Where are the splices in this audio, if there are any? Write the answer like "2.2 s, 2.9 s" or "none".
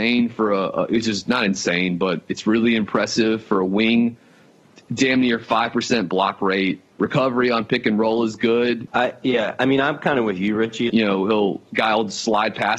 6.9 s, 8.9 s, 10.9 s